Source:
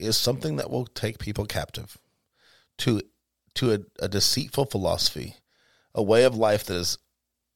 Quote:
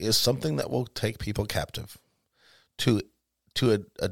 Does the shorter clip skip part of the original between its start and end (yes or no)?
no